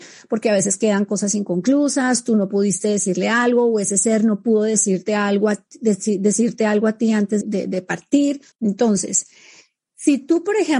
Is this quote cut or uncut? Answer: cut